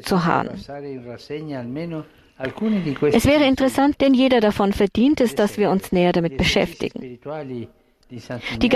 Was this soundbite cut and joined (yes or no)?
yes